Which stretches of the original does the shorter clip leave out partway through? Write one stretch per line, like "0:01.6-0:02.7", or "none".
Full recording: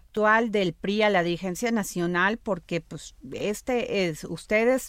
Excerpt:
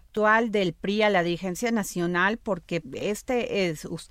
0:02.8-0:03.2